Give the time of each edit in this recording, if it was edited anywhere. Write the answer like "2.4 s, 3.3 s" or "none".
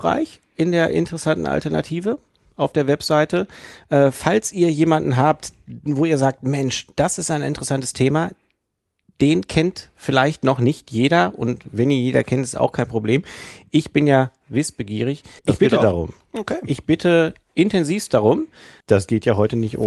15.4 s, 18.8 s